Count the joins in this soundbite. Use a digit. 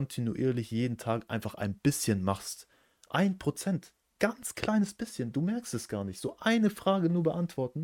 0